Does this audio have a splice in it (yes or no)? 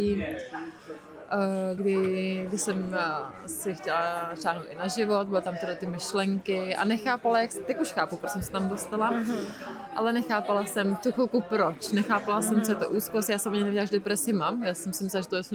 yes